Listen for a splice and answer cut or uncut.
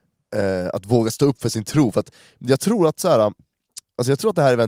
uncut